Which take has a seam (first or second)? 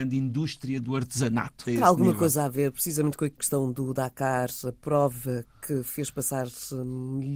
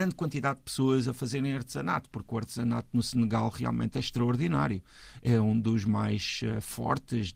first